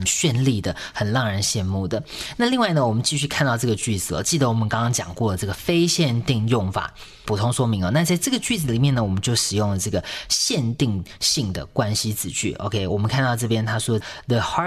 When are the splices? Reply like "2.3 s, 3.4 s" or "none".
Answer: none